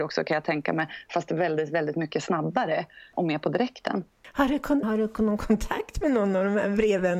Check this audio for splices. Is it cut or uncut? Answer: cut